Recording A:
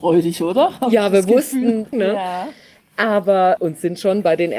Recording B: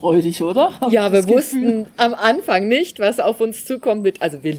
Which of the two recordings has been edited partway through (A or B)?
A